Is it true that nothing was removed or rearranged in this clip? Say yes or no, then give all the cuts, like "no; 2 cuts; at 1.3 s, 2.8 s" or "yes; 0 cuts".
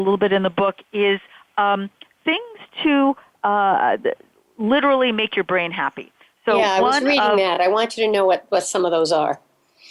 yes; 0 cuts